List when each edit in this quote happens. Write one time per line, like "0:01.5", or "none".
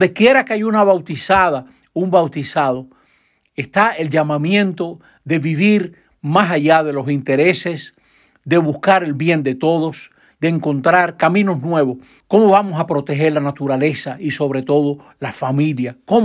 0:12.2